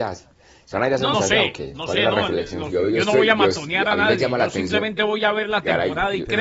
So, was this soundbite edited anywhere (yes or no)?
yes